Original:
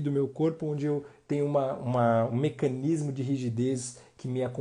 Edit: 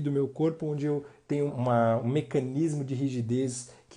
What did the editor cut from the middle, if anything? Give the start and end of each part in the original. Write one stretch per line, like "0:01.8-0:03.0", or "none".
0:01.5-0:01.8